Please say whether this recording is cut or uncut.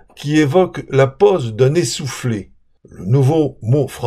uncut